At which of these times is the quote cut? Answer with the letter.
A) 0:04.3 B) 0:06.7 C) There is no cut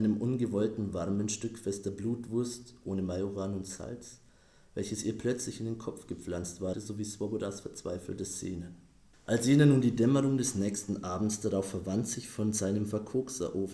B